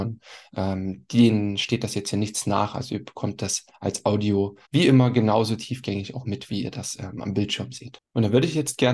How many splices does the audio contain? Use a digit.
1